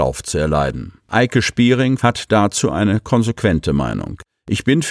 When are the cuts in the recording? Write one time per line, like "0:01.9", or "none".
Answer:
0:01.0
0:02.0